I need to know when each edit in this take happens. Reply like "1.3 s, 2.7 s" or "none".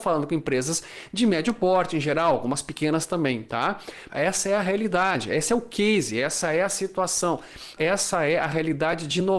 4.1 s, 7.8 s